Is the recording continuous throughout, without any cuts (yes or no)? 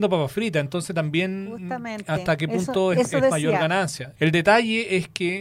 no